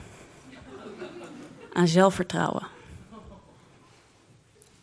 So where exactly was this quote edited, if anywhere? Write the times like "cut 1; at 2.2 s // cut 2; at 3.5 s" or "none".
none